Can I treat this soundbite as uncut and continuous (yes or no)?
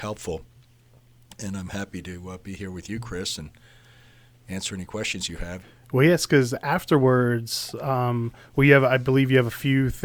no